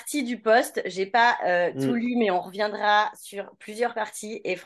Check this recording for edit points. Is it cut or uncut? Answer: uncut